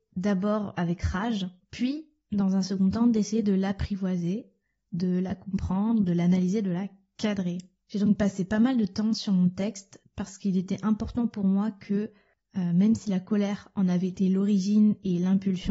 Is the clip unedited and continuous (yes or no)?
yes